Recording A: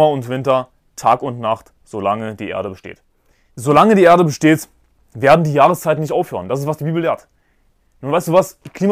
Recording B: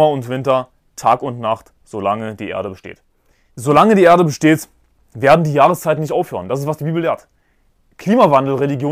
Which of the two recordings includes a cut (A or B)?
A